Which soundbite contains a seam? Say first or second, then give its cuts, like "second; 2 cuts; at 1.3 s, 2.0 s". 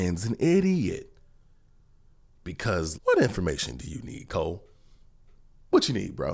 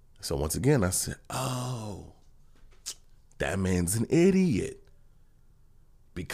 first; 1 cut; at 2.9 s